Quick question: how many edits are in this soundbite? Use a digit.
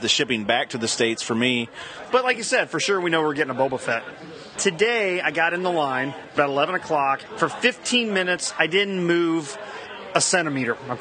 1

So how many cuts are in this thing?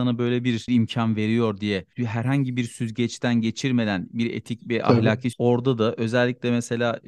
1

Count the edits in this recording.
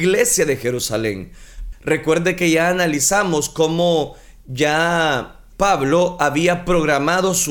2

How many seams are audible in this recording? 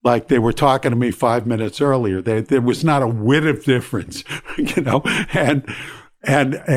0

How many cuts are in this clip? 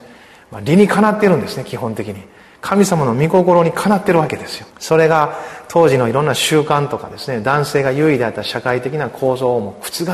1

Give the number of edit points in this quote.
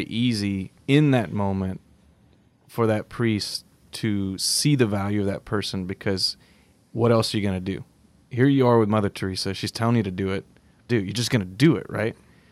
1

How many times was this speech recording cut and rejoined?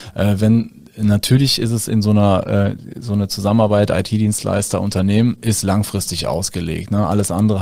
0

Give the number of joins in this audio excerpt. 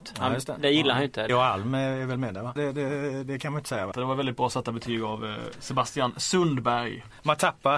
3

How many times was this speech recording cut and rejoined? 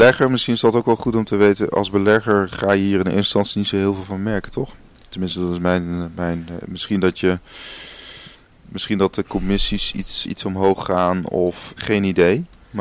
2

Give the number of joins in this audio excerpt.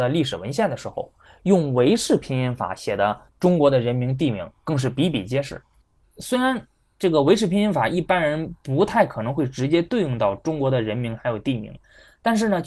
1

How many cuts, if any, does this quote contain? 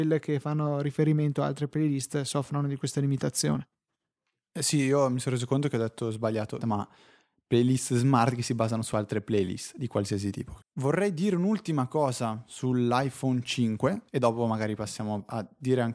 3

